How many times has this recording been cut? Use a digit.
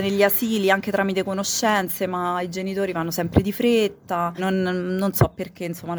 1